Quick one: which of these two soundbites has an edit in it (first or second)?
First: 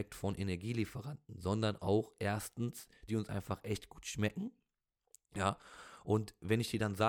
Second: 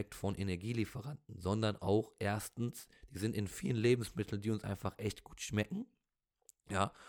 first